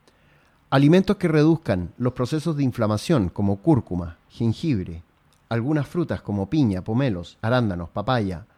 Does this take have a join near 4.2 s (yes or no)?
no